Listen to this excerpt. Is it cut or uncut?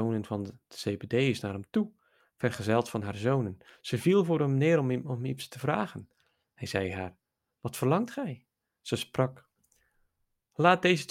uncut